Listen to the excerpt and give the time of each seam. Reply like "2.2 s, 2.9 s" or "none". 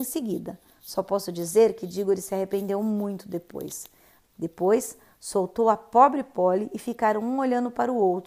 4.2 s